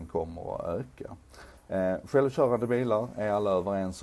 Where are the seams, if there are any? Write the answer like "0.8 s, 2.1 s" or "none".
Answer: 1.6 s